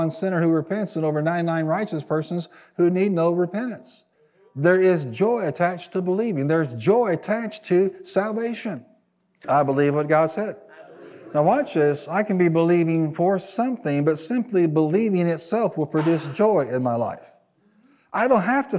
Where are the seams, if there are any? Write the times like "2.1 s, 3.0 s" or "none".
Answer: 9.4 s